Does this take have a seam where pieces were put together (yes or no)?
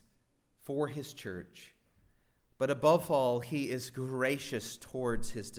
no